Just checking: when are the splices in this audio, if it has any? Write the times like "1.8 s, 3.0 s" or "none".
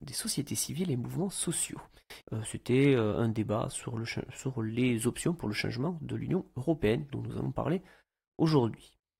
2.2 s, 7.1 s